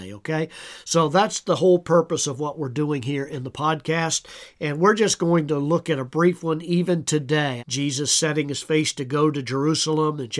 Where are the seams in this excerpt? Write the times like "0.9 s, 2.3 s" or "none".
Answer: 7.6 s